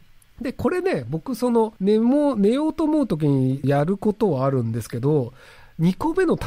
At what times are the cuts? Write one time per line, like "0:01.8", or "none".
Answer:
0:01.8
0:03.6